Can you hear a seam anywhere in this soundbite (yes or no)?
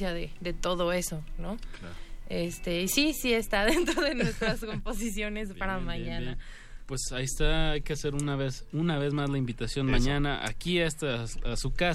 no